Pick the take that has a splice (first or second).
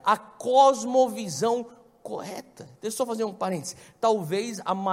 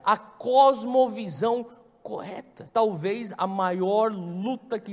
second